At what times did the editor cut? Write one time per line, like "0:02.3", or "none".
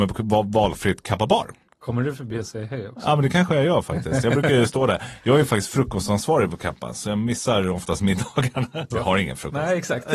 0:08.9